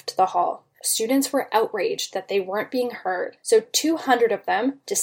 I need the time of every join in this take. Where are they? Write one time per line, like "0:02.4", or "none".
none